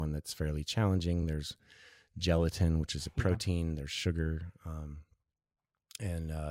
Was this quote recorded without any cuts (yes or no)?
yes